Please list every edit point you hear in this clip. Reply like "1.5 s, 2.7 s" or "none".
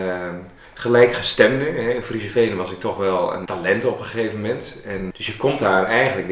3.5 s, 5.1 s